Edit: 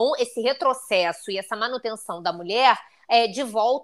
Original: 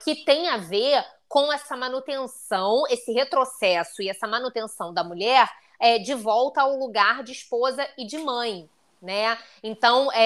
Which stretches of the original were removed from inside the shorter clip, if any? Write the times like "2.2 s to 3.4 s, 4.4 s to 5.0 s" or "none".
none